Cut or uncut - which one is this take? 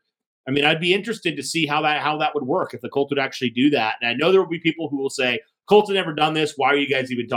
uncut